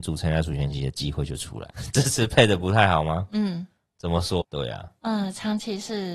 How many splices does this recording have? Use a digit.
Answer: 2